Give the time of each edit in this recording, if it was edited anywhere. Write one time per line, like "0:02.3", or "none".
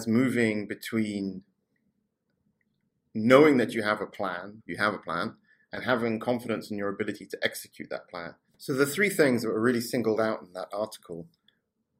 0:04.6
0:08.5